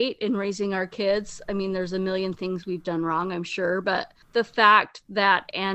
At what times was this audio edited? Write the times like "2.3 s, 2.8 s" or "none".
4.2 s

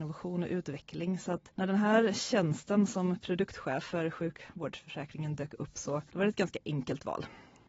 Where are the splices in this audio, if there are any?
none

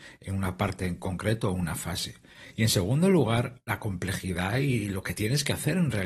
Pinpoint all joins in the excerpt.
none

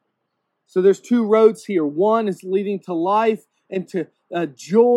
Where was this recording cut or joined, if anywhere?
none

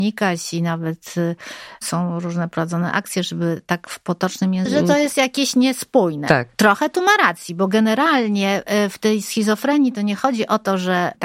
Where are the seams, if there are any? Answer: 4.7 s

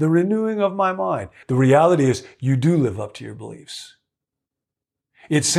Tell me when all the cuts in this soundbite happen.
1.4 s

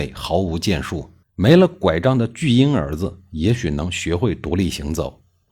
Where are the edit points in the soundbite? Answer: 1.2 s

